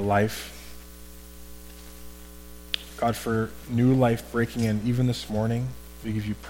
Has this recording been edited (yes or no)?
no